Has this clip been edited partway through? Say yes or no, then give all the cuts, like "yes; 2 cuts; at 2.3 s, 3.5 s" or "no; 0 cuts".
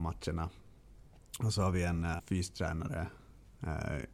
yes; 1 cut; at 2.2 s